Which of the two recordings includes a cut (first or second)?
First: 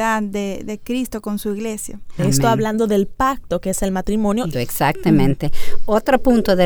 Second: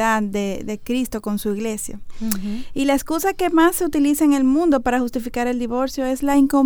first